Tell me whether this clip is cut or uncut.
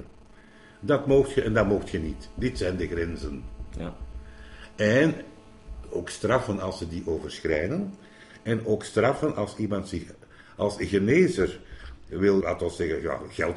cut